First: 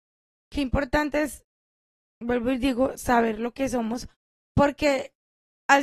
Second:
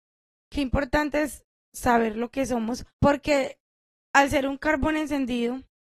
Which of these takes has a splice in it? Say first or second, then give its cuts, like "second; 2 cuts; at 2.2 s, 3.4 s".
second; 2 cuts; at 1.7 s, 2.9 s